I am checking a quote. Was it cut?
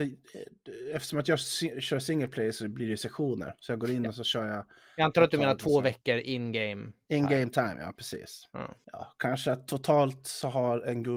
no; 0 cuts

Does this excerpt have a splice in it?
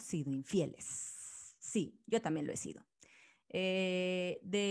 no; 0 cuts

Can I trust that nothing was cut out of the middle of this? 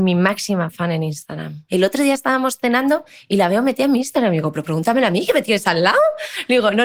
no; 1 cut; at 1.7 s

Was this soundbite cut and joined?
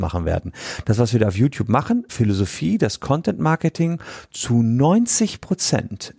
yes; 1 cut; at 2.1 s

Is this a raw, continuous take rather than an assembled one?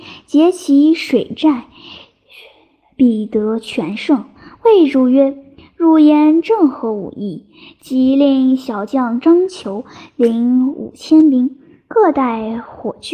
yes; 0 cuts

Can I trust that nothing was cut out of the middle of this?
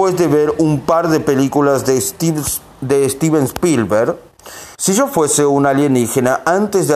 no; 1 cut; at 4.7 s

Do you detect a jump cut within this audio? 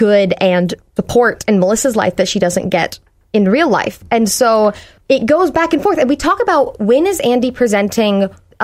no; 0 cuts

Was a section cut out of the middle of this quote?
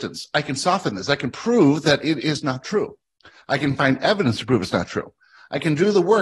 no; 0 cuts

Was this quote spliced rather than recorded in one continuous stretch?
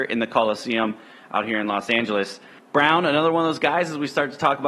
no; 0 cuts

